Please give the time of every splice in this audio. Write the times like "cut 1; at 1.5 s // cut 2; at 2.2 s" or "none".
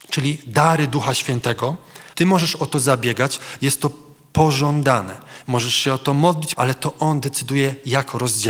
cut 1; at 2.1 s // cut 2; at 6.5 s